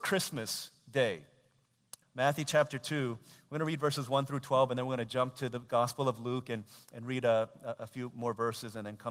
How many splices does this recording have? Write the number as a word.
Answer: one